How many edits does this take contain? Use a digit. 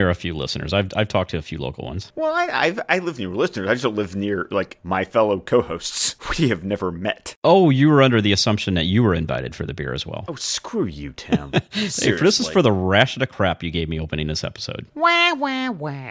0